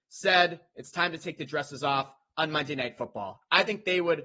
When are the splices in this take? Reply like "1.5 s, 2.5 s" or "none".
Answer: none

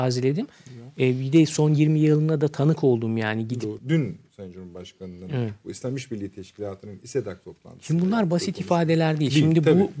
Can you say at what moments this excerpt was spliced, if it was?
3.8 s

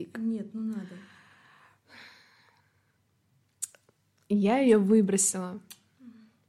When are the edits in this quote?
none

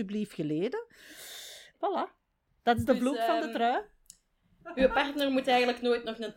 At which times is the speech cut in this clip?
1.7 s

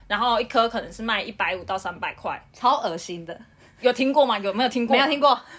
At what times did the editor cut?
2.5 s

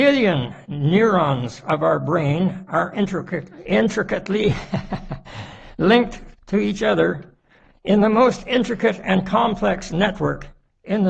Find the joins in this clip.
3.6 s

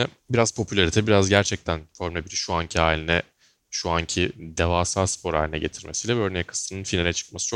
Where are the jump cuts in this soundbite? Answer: none

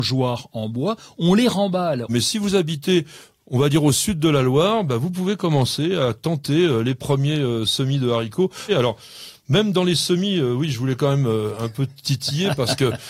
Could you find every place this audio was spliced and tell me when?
2.1 s, 8.7 s

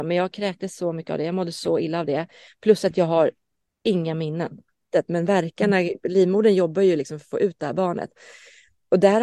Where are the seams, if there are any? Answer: 4.8 s

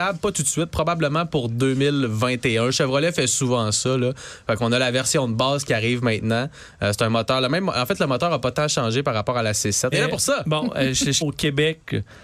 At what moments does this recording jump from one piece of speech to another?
9.9 s, 11.2 s

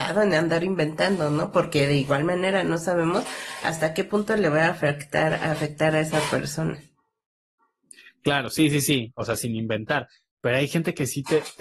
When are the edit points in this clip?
none

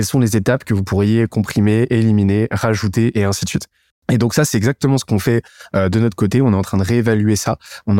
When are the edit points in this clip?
3.9 s

